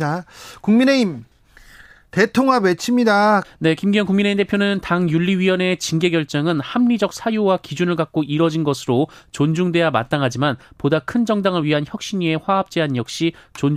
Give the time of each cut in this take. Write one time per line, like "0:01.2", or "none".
0:03.4